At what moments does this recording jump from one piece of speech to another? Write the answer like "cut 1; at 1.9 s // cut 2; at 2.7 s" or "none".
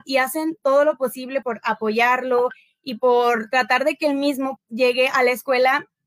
cut 1; at 1.4 s // cut 2; at 4.6 s